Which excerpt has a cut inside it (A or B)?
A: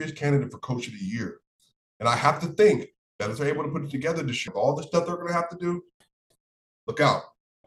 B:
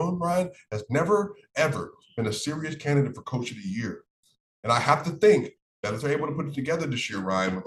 A